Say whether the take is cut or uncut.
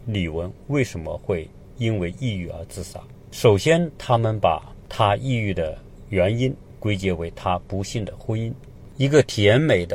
cut